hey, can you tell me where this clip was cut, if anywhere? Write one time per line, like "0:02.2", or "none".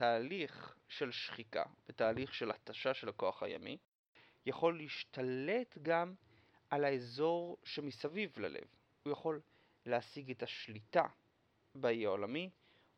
none